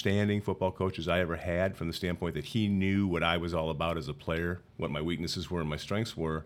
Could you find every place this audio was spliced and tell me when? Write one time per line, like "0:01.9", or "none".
0:04.6